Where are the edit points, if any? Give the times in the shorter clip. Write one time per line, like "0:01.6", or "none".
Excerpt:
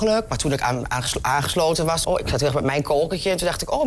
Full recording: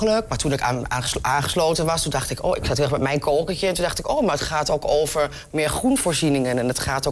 0:02.0